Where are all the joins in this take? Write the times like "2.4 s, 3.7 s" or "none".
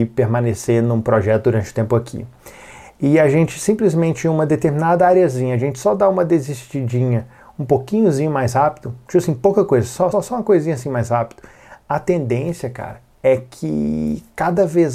10.1 s